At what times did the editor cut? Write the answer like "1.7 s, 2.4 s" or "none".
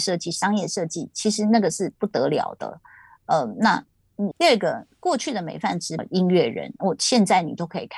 4.3 s, 6.0 s